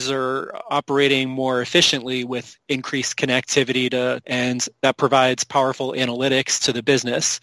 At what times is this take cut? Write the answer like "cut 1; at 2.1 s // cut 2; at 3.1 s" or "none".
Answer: cut 1; at 4.2 s